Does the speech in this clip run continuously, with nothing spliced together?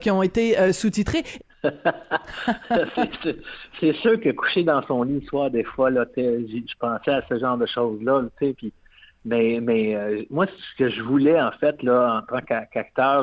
no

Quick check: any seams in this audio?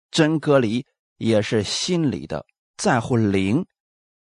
no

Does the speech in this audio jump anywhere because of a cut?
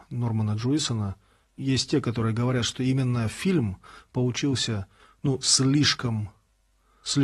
no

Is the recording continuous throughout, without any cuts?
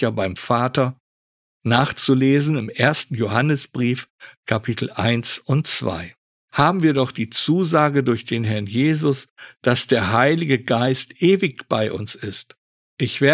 no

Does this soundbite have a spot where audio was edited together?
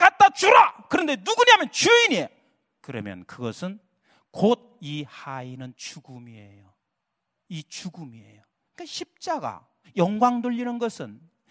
yes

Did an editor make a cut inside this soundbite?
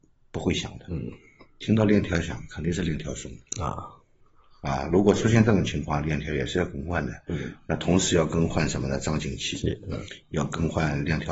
no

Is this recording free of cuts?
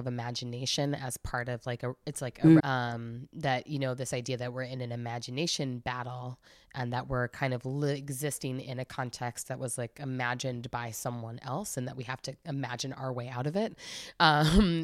no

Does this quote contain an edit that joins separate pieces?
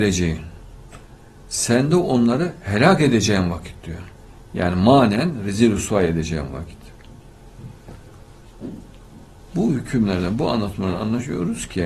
no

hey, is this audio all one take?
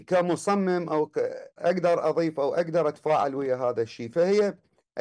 no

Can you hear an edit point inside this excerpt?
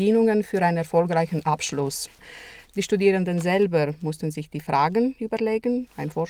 yes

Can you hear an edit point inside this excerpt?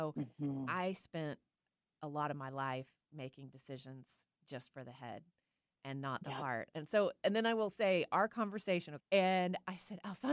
yes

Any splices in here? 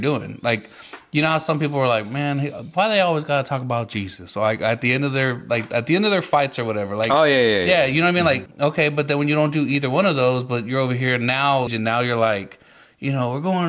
yes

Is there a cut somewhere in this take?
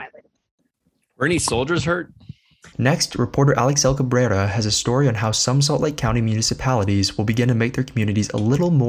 yes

